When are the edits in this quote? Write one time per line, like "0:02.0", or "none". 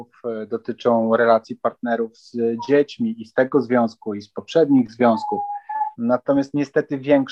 0:05.9